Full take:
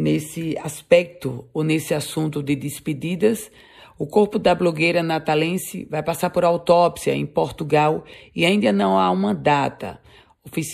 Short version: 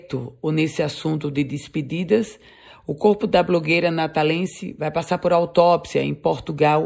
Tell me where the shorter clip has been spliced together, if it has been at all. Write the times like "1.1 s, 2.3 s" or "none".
none